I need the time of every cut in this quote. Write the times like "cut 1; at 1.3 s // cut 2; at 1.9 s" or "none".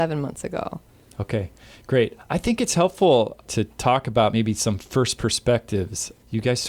none